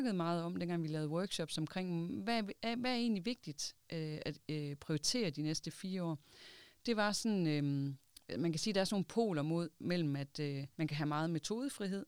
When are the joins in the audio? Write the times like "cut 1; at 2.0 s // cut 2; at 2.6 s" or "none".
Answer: cut 1; at 10.7 s